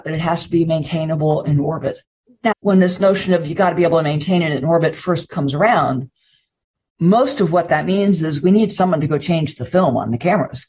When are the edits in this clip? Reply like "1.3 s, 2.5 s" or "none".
2.5 s

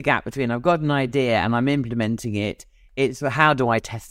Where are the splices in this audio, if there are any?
none

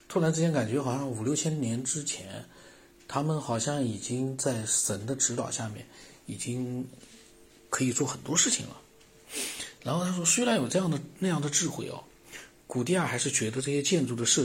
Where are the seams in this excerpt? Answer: 9.8 s

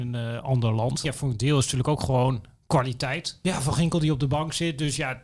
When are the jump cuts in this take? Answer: 1.0 s, 3.4 s

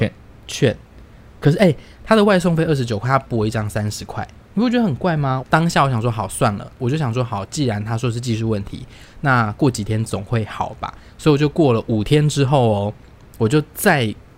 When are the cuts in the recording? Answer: 5.4 s

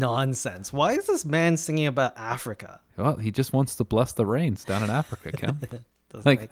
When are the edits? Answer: 2.9 s

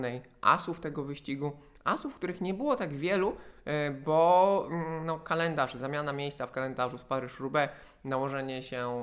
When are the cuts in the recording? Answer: none

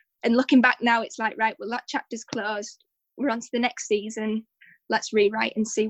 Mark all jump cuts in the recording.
none

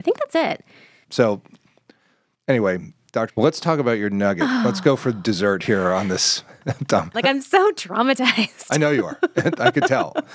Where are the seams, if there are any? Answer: 1.0 s, 3.3 s, 7.1 s

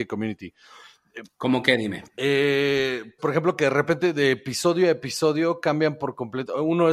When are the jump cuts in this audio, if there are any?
3.2 s

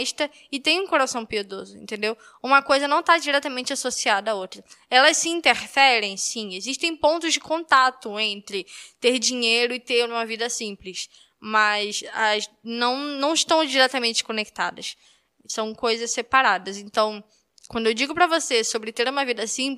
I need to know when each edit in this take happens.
none

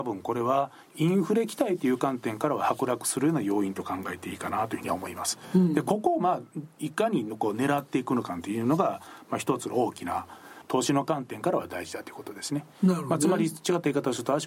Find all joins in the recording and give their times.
none

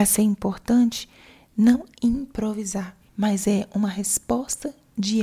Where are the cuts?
3.1 s

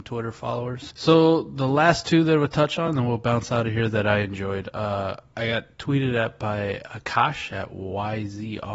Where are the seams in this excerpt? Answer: 0.9 s

